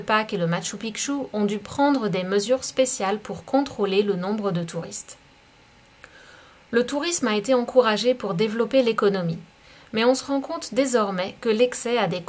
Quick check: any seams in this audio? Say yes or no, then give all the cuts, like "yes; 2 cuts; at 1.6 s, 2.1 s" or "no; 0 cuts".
no; 0 cuts